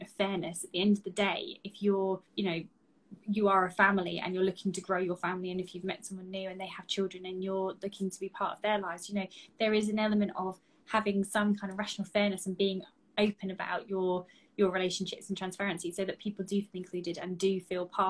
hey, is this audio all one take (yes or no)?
no